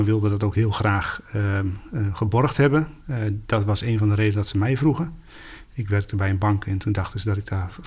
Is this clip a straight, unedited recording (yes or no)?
yes